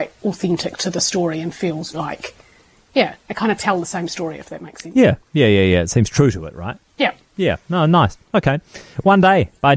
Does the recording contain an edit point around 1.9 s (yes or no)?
yes